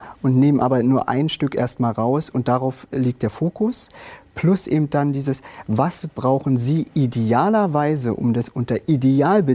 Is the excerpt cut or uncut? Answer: uncut